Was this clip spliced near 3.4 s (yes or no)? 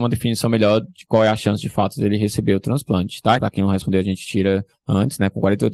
yes